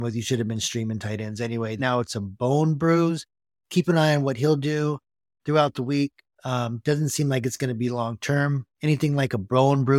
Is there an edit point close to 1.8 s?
yes; 1 cut; at 1.8 s

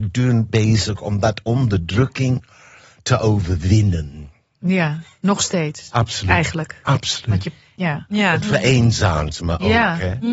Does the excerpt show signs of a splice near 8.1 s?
yes; 1 cut; at 8.1 s

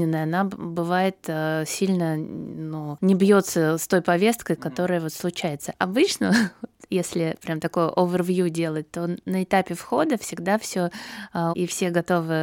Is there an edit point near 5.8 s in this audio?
yes; 2 cuts; at 5.8 s, 11.5 s

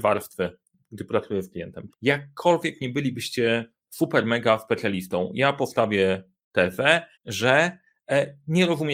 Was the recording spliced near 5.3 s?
no; 2 cuts; at 1.9 s, 7.1 s

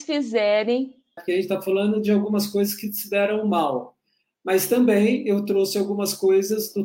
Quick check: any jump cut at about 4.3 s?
no; 1 cut; at 1.2 s

